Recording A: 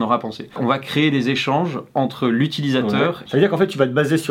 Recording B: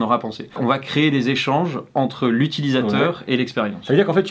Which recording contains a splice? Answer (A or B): A